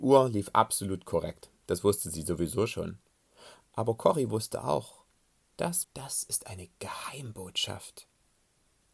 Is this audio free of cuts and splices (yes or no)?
no